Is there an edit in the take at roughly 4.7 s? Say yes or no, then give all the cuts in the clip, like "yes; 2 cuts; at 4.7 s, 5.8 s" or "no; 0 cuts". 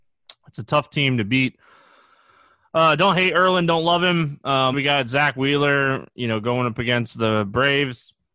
yes; 1 cut; at 4.7 s